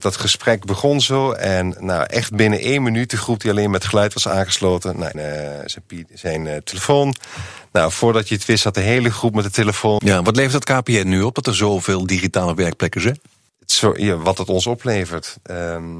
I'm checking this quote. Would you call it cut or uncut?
cut